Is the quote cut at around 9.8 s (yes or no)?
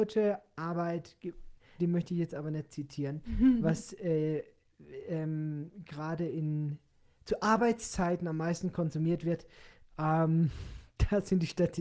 no